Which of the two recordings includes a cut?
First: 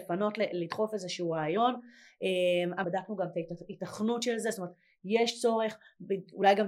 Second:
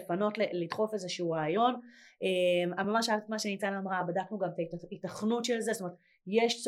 first; 1 cut; at 2.8 s

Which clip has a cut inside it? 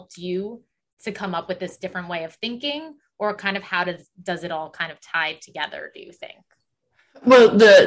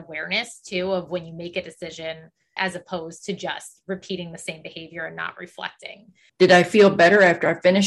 second; 2 cuts; at 2.6 s, 6.3 s

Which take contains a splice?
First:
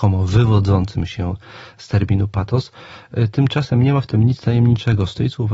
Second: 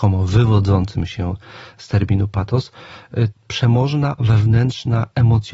second; 1 cut; at 3.3 s

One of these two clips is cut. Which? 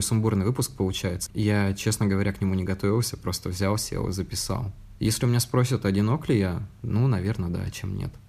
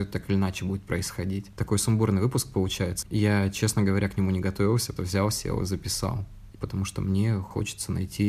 second; 2 cuts; at 5.0 s, 6.5 s

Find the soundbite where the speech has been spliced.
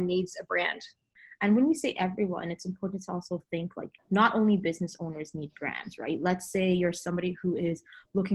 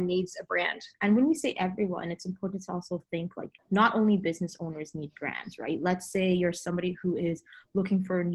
second; 1 cut; at 0.9 s

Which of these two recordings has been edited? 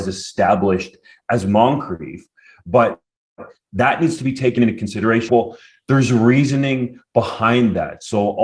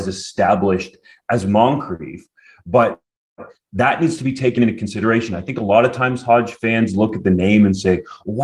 first; 1 cut; at 5.3 s

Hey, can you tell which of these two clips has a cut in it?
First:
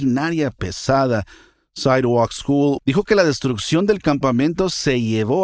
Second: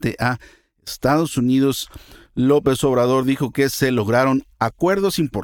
first; 1 cut; at 2.8 s

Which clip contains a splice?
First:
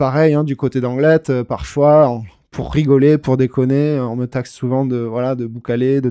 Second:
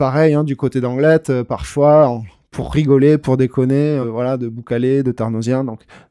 second; 1 cut; at 4.0 s

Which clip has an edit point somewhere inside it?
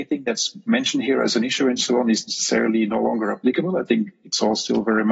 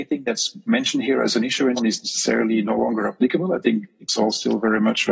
second; 1 cut; at 1.8 s

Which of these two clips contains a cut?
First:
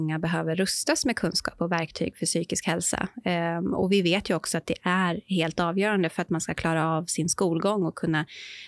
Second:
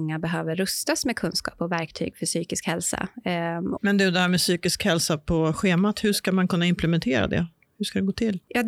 second; 1 cut; at 3.8 s

